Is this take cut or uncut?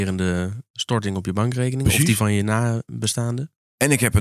uncut